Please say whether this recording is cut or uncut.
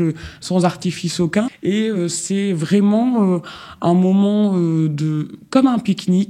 cut